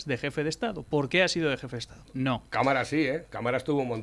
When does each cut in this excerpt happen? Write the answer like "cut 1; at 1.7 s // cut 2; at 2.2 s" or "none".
cut 1; at 2.1 s